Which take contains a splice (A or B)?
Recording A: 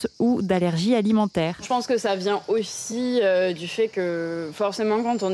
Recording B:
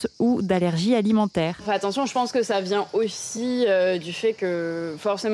A